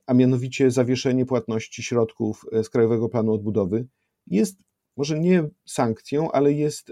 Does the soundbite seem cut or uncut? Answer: uncut